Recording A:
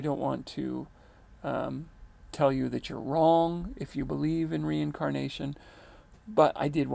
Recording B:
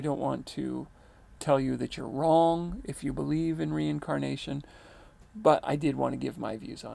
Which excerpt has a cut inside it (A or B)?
B